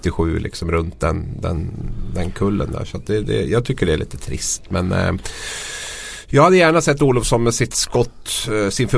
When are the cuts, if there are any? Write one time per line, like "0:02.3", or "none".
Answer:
none

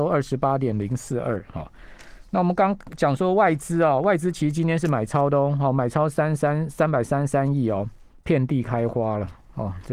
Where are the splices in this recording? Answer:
0:08.1

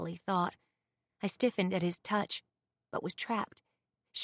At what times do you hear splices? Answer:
none

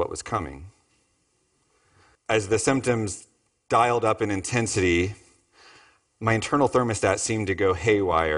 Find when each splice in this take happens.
0:02.1

